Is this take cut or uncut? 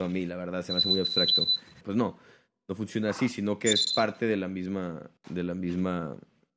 cut